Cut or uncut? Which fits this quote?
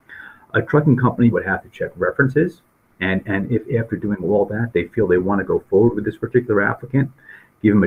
cut